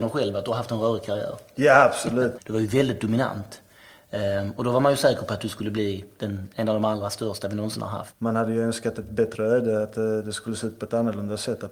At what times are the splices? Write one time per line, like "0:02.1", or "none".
0:02.4
0:08.1